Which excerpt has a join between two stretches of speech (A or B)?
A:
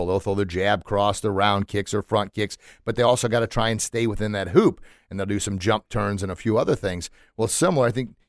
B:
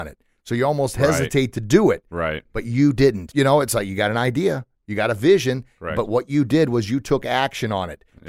B